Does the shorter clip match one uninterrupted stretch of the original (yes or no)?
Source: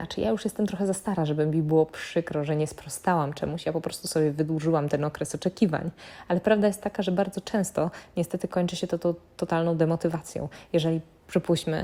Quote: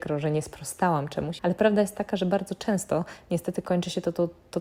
no